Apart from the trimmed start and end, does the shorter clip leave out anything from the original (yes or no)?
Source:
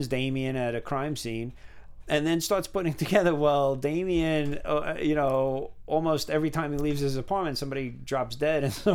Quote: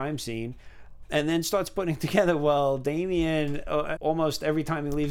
yes